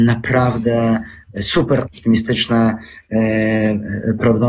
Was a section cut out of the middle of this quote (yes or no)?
no